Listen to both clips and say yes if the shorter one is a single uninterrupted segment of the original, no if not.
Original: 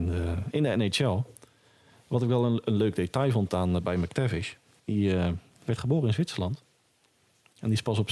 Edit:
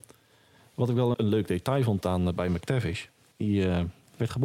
no